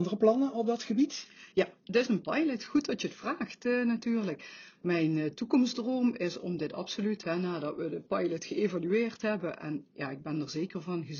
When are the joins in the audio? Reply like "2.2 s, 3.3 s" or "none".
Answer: none